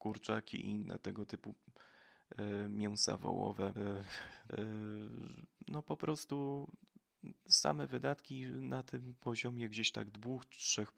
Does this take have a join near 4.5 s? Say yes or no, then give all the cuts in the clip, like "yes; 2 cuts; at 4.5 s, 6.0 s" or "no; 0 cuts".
yes; 1 cut; at 4.5 s